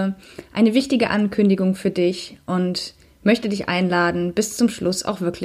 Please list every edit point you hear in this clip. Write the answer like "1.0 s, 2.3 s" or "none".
none